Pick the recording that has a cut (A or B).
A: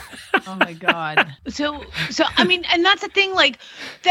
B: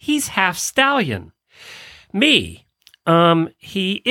A